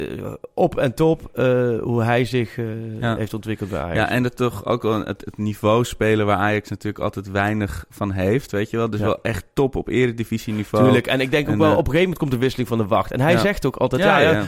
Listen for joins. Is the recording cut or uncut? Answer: uncut